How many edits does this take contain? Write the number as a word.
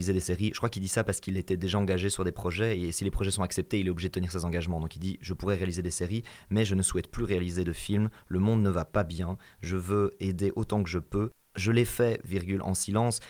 zero